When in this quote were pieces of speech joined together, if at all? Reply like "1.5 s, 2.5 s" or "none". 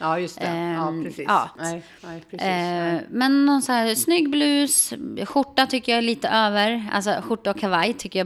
1.6 s

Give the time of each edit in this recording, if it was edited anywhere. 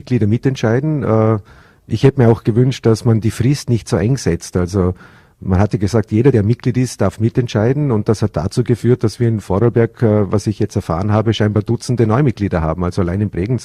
none

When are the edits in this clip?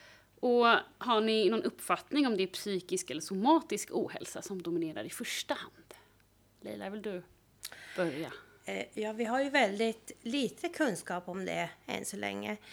none

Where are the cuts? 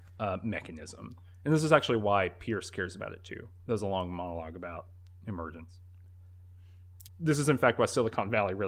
3.6 s, 7.1 s

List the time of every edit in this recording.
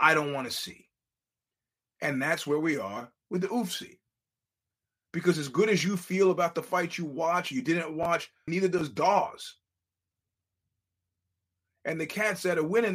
8.5 s

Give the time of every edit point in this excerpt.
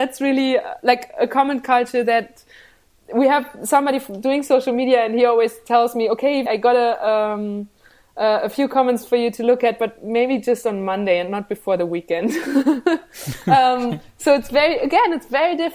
6.5 s

